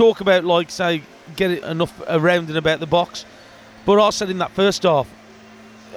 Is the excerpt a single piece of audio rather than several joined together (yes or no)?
no